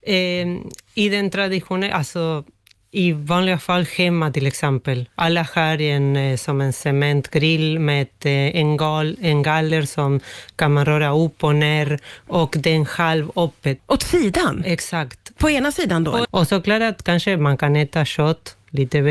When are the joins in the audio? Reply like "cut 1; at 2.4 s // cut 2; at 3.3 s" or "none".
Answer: cut 1; at 13.8 s // cut 2; at 16.2 s